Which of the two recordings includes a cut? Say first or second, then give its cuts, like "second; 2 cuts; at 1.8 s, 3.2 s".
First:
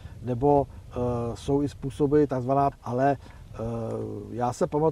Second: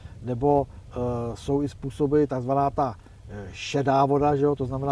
first; 1 cut; at 2.7 s